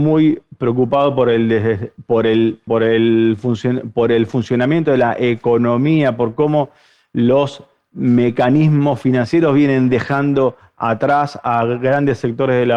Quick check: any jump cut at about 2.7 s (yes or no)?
yes